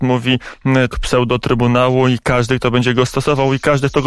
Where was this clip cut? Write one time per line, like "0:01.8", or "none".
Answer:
0:00.9